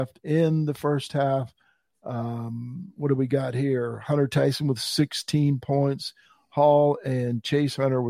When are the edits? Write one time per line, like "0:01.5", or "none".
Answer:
none